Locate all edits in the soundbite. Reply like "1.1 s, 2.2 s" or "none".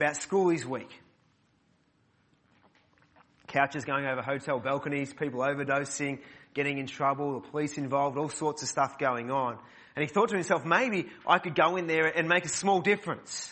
none